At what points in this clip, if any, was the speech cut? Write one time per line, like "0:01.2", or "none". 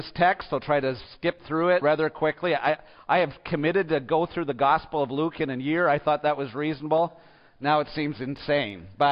0:01.8